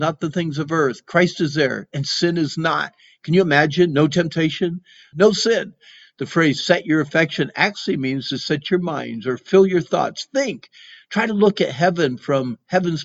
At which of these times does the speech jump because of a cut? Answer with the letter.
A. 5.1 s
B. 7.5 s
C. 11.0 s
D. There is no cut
A